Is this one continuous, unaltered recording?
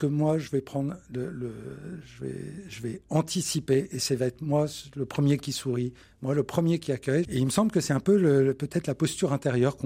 no; 1 cut; at 7.2 s

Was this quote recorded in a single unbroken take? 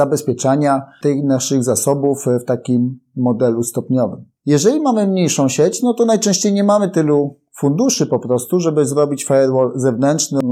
yes; 0 cuts

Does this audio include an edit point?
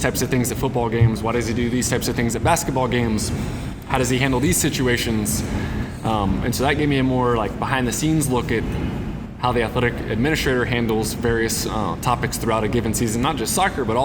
no; 0 cuts

